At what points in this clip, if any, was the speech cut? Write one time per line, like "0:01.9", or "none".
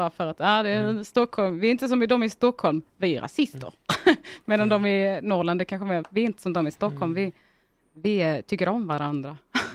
0:06.0